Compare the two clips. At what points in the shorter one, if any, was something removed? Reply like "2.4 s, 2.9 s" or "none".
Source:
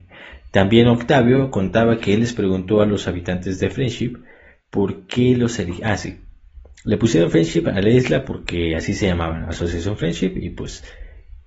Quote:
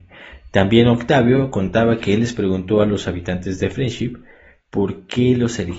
none